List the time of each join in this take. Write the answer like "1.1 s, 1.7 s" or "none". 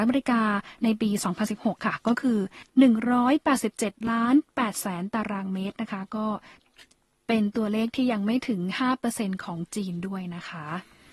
2.7 s